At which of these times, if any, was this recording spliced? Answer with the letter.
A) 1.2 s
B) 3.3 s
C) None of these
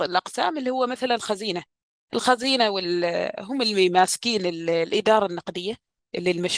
C